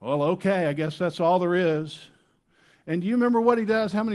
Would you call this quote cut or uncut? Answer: uncut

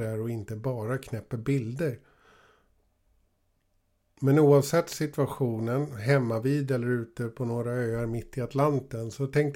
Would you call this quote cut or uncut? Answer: uncut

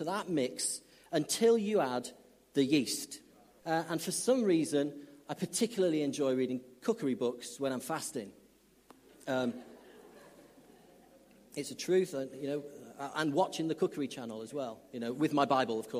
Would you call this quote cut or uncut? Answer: cut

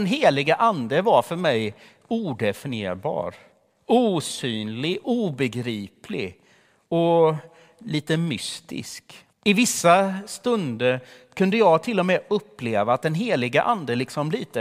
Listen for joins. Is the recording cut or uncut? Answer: cut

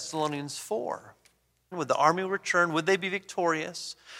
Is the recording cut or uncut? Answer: cut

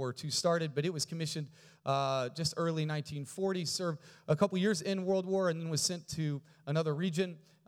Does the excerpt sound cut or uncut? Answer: uncut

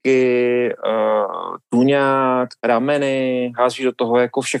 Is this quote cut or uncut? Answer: cut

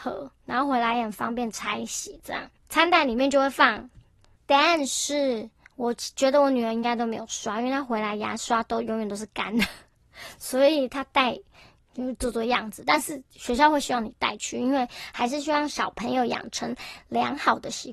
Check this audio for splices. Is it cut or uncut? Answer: cut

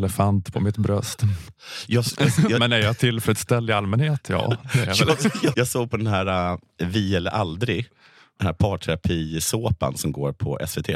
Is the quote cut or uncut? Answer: cut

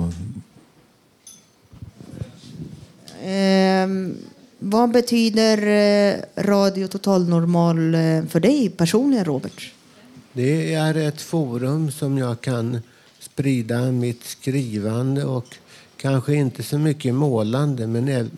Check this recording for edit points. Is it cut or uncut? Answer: uncut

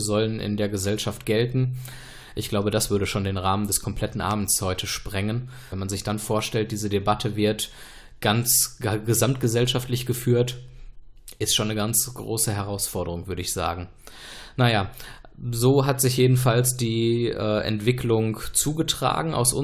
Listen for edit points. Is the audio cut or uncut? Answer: cut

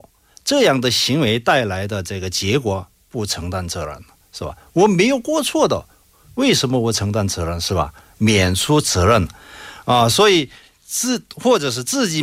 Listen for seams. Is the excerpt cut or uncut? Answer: uncut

